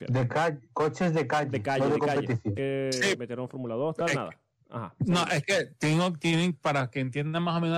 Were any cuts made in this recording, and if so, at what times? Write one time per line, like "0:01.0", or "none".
0:02.6